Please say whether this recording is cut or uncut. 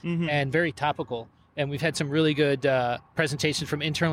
cut